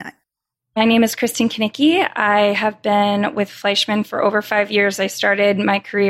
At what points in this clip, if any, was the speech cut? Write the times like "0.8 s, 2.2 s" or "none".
none